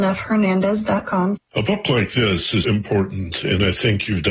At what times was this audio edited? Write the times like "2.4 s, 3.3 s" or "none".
1.4 s, 2.6 s